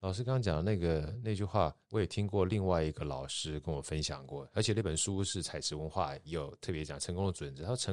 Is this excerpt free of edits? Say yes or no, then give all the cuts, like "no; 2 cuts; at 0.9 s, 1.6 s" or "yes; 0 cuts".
no; 1 cut; at 1.8 s